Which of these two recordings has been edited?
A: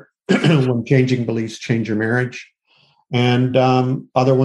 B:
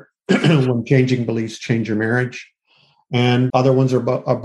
B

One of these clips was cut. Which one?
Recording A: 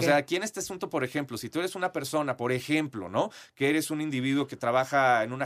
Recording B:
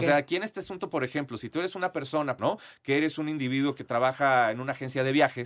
B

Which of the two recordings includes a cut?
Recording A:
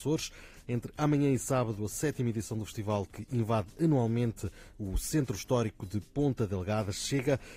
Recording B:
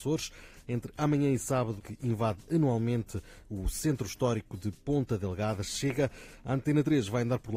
B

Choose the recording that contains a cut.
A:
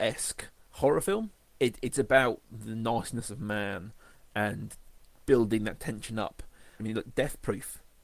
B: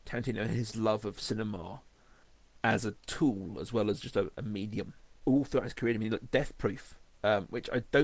A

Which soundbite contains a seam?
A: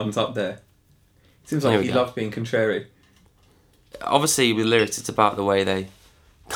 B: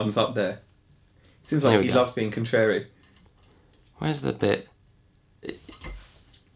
A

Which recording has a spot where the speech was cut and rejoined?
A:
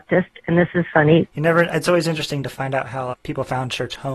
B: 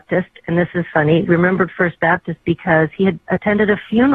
A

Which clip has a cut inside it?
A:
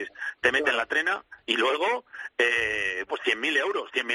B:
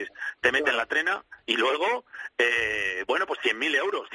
A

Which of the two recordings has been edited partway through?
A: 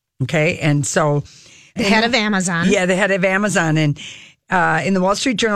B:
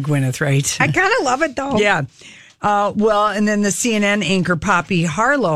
A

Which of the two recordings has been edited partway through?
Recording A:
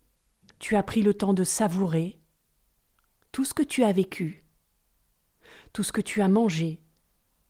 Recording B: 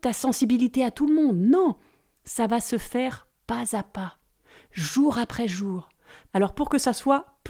B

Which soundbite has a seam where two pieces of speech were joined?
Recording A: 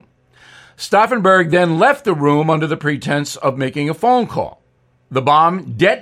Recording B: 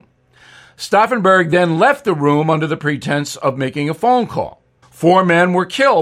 B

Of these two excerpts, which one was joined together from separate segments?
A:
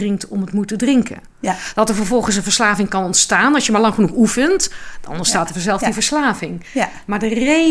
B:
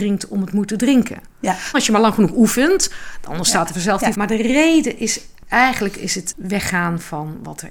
B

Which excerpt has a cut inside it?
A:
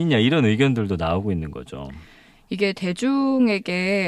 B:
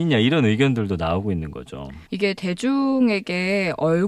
B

